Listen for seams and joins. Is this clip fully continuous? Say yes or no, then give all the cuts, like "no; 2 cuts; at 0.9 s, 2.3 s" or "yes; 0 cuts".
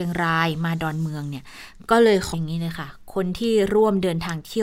no; 1 cut; at 2.3 s